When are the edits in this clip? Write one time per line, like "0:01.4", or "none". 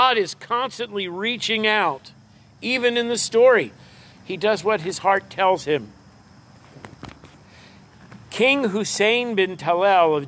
0:04.1